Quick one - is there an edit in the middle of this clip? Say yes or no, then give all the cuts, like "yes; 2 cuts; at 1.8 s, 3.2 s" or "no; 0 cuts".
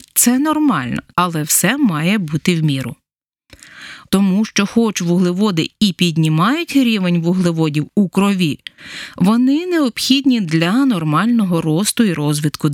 yes; 2 cuts; at 1.1 s, 4.1 s